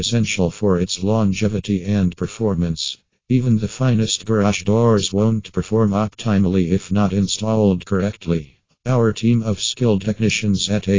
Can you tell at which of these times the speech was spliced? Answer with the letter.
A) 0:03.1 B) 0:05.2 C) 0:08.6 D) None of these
A